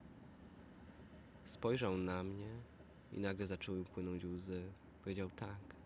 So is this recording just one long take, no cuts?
yes; 0 cuts

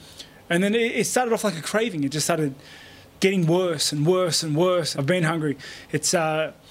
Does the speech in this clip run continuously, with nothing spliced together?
no; 2 cuts; at 3.1 s, 4.9 s

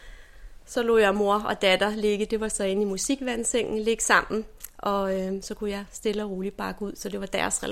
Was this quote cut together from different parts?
no; 0 cuts

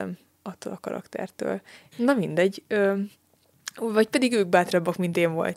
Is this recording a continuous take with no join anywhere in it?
no; 1 cut; at 1.9 s

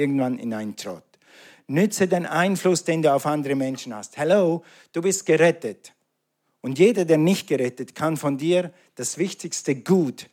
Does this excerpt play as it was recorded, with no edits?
yes; 0 cuts

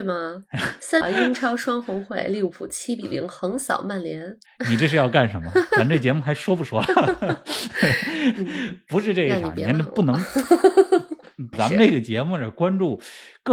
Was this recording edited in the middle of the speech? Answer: yes; 2 cuts; at 1.0 s, 11.5 s

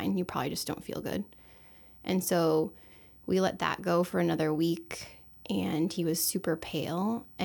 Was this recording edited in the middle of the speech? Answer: no; 0 cuts

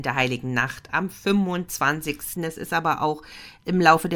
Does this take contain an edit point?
yes; 1 cut; at 2.4 s

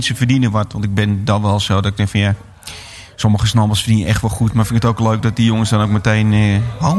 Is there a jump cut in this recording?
no; 0 cuts

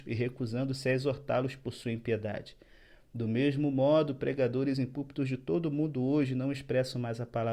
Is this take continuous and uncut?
yes; 0 cuts

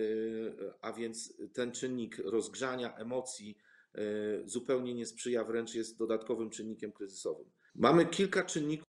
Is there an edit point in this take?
yes; 1 cut; at 7.7 s

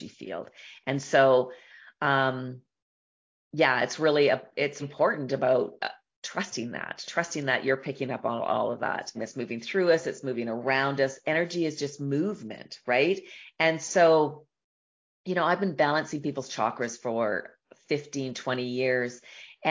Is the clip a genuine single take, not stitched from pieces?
no; 2 cuts; at 4.8 s, 9.1 s

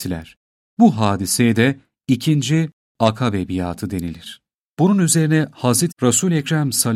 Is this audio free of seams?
no; 1 cut; at 5.9 s

